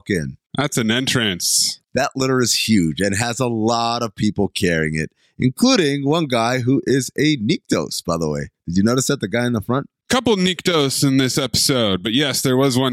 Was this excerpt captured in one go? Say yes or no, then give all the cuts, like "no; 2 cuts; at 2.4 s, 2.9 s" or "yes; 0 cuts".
yes; 0 cuts